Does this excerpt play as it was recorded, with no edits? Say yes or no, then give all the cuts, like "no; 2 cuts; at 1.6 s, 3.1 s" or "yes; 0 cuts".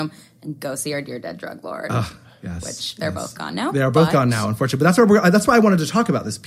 yes; 0 cuts